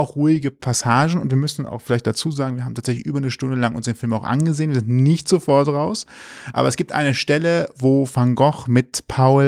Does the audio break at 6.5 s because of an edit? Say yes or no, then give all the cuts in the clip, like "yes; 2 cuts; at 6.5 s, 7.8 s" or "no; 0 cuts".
no; 0 cuts